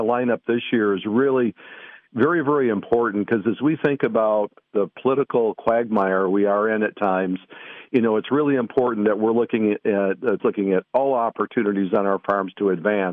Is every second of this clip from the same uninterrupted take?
no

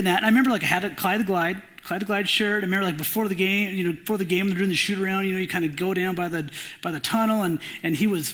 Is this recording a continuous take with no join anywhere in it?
yes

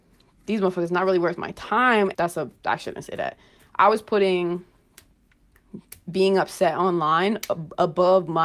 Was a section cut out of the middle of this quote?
yes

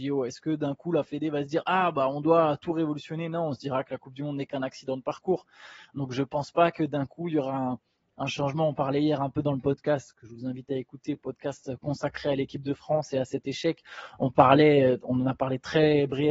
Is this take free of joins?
yes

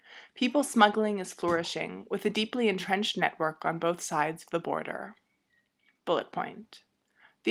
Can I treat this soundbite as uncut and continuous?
no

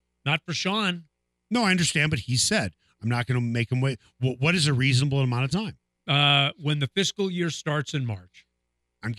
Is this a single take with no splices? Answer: yes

